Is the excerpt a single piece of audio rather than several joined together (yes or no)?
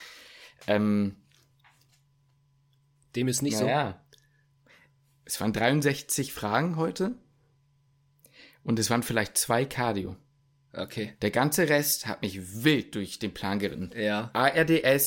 yes